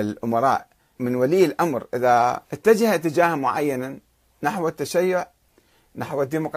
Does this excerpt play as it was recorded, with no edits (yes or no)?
no